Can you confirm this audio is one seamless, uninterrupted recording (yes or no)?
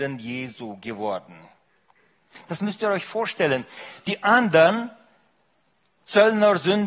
yes